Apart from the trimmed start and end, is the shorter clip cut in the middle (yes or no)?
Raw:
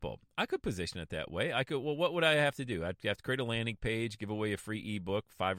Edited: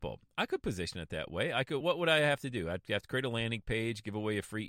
yes